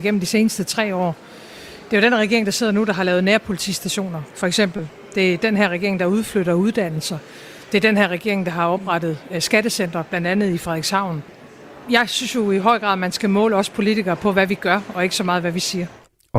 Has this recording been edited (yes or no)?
no